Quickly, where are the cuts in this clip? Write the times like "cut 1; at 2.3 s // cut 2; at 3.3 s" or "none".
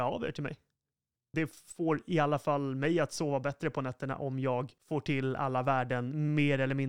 cut 1; at 1.3 s // cut 2; at 4.8 s